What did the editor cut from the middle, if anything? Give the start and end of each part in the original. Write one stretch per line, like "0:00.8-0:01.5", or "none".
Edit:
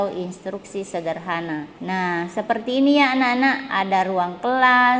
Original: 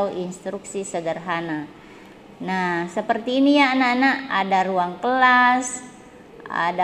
0:01.8-0:02.4